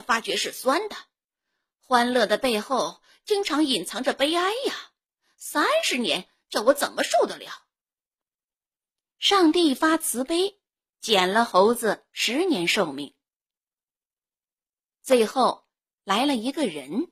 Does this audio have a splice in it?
no; 0 cuts

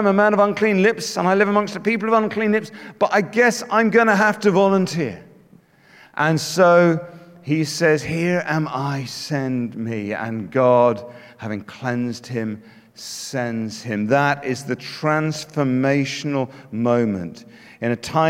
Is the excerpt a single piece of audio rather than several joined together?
yes; 0 cuts

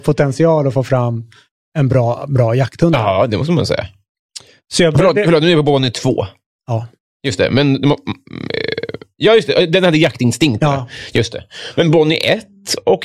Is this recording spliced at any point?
no; 0 cuts

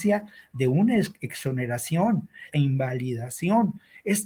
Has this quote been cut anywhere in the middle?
yes; 1 cut; at 2.5 s

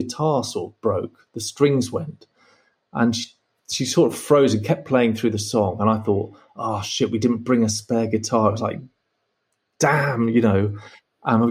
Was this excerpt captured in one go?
yes; 0 cuts

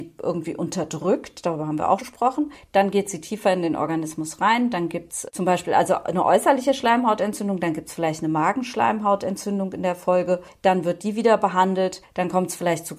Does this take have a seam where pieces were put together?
yes; 1 cut; at 2.0 s

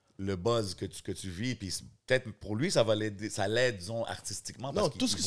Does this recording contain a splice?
no; 0 cuts

